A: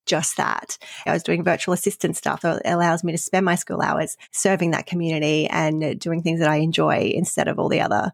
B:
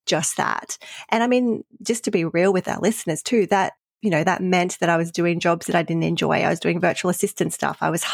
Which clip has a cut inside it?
A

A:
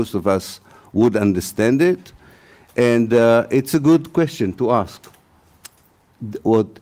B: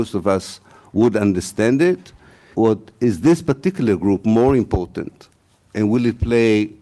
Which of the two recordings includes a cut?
B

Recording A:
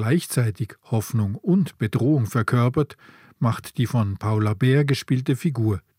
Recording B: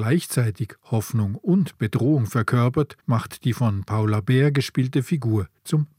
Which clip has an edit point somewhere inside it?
B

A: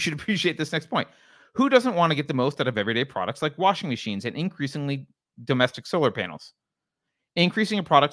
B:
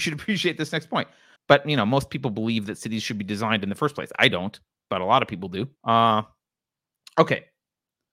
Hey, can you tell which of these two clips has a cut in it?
B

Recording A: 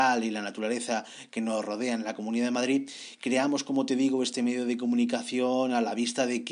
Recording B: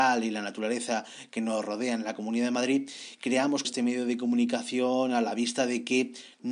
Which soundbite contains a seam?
B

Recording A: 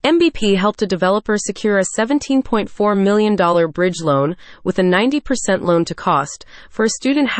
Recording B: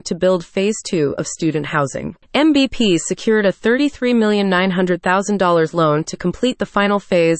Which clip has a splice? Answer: B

